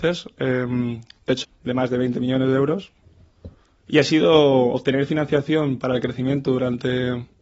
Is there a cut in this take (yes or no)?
yes